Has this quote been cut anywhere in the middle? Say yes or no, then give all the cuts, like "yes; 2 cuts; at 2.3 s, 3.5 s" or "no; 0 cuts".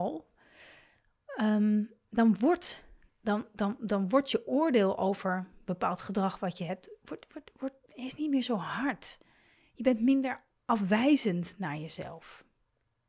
no; 0 cuts